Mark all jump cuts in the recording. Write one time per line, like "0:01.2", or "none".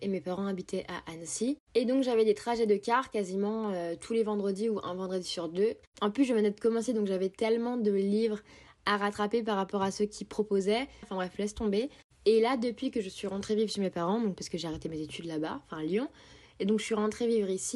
0:05.8
0:11.0